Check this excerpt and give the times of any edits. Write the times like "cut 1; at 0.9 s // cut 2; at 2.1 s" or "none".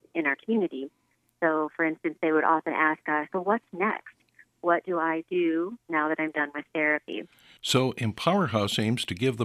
cut 1; at 3.3 s